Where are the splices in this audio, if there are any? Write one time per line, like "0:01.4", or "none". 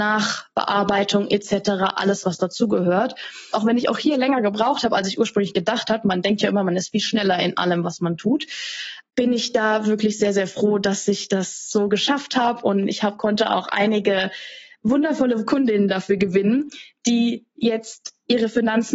0:03.5